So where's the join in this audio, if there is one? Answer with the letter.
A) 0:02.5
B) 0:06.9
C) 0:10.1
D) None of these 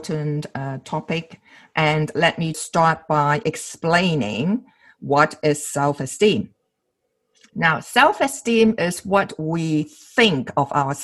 A